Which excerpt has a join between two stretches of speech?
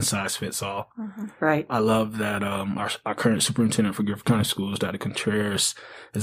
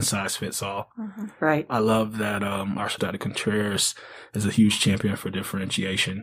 second; 1 cut; at 3.0 s

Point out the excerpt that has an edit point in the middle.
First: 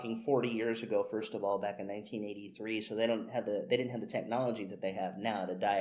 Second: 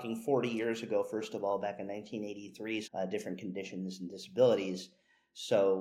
second; 1 cut; at 2.8 s

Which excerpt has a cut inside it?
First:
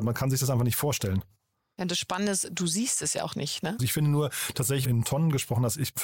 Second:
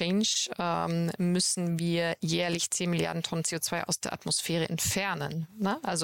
first; 2 cuts; at 3.8 s, 4.8 s

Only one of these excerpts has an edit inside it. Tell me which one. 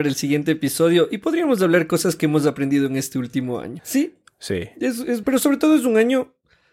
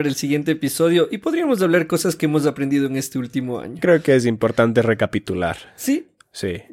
first; 2 cuts; at 3.8 s, 5.2 s

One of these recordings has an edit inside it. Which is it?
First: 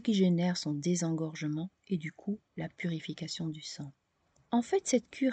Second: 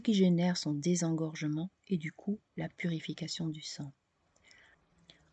first; 1 cut; at 4.4 s

